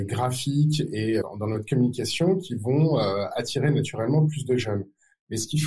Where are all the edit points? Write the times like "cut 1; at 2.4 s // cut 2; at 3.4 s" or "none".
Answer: cut 1; at 1.2 s